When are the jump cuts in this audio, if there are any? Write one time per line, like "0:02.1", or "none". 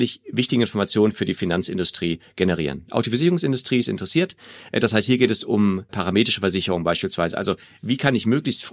0:05.9